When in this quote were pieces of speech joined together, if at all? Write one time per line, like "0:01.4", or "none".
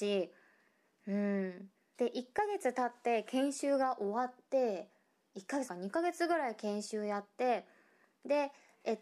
0:01.9
0:05.7